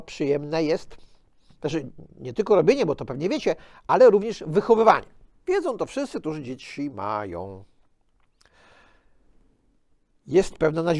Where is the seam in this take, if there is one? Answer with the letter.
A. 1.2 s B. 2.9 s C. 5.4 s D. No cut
D